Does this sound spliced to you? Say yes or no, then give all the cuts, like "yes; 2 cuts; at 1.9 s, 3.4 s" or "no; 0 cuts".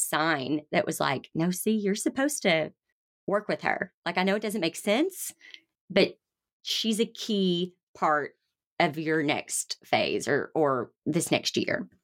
no; 0 cuts